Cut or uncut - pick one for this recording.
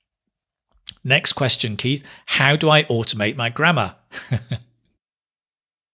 uncut